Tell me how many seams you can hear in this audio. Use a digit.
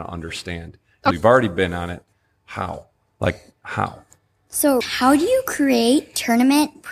2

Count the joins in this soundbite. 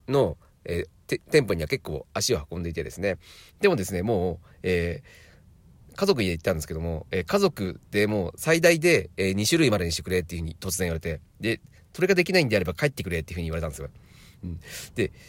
1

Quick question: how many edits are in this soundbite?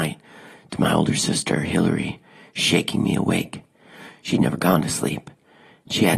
0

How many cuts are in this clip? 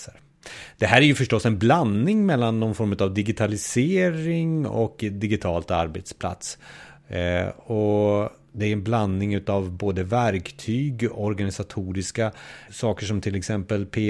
1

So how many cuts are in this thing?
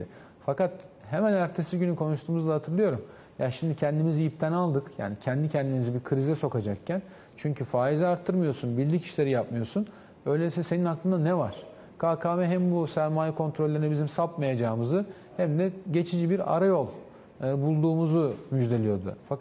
1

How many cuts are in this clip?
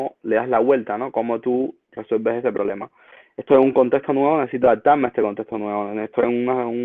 1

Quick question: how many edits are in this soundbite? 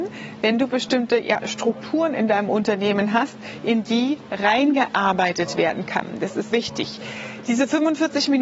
1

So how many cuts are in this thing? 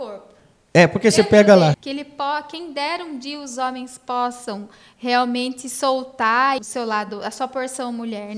2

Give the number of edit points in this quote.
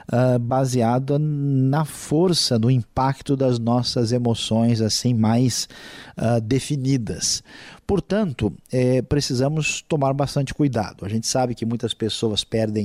0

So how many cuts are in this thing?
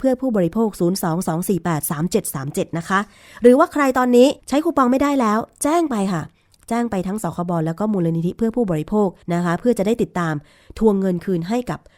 2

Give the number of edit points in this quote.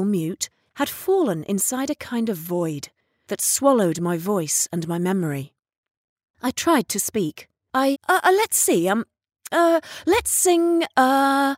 1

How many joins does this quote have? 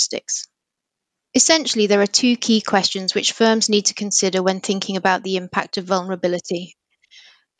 1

